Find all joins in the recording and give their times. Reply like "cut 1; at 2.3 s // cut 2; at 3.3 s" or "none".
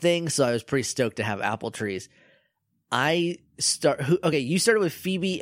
none